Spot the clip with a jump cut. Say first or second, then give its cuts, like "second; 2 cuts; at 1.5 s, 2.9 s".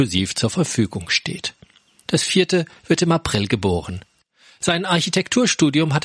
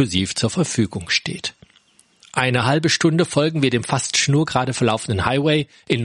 first; 1 cut; at 2.0 s